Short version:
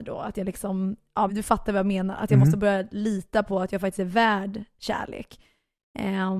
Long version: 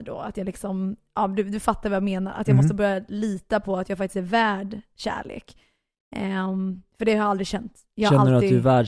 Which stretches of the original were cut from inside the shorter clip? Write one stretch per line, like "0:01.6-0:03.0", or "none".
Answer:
0:01.3-0:01.4